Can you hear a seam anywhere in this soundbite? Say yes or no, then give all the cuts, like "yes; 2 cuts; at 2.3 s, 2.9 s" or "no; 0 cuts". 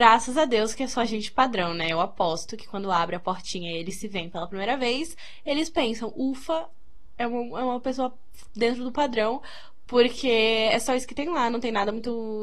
no; 0 cuts